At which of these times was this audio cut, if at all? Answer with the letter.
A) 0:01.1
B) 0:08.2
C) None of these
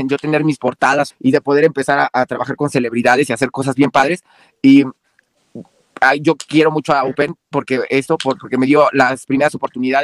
A